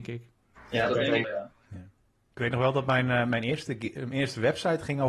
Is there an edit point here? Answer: yes; 1 cut; at 1.2 s

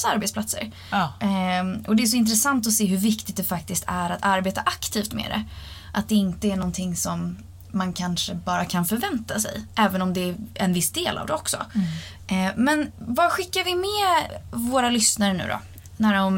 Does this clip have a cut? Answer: no; 0 cuts

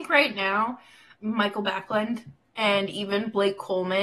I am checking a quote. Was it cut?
yes; 1 cut; at 1.1 s

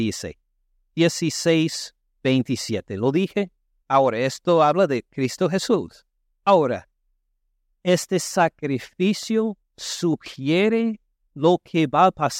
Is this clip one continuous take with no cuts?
no; 1 cut; at 3.8 s

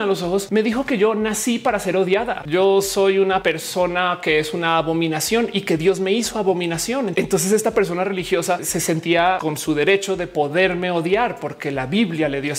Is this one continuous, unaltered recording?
no; 1 cut; at 2.4 s

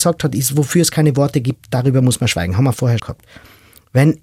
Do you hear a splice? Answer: yes; 1 cut; at 3.0 s

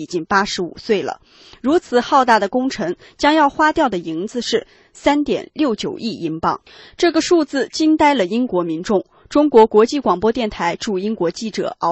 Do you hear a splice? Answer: no; 0 cuts

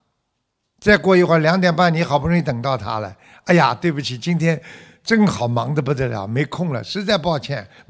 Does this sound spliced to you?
no; 0 cuts

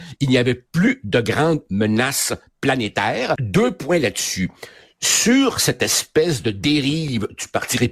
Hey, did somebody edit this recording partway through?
yes; 1 cut; at 3.3 s

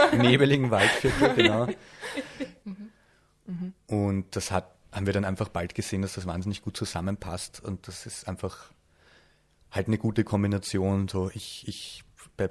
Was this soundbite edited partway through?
yes; 1 cut; at 2.6 s

